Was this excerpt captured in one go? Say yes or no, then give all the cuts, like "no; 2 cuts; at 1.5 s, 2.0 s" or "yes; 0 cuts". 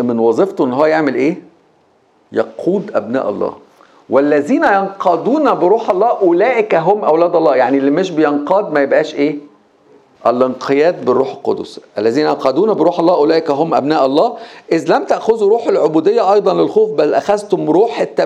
no; 1 cut; at 10.1 s